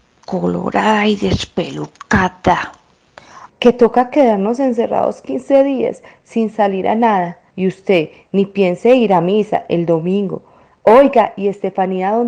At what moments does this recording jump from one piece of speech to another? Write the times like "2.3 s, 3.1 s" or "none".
3.5 s, 7.5 s, 10.8 s